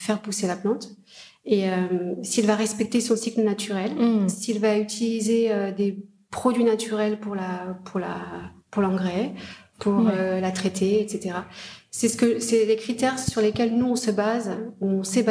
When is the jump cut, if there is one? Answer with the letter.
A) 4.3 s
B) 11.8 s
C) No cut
C